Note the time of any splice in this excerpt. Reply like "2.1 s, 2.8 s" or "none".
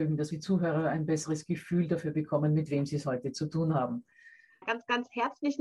4.6 s